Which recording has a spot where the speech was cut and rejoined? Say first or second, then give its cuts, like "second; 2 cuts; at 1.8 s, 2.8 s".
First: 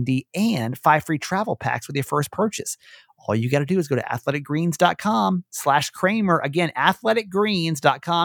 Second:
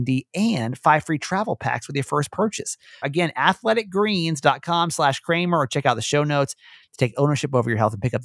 second; 1 cut; at 3.0 s